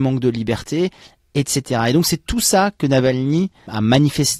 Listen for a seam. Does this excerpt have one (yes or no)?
no